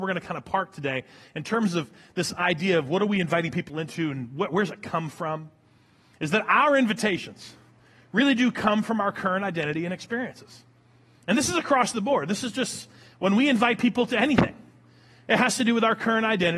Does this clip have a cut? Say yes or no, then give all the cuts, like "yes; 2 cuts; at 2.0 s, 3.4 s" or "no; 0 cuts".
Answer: no; 0 cuts